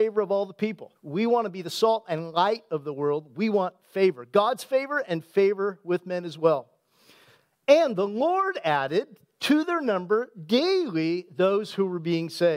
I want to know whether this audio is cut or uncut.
cut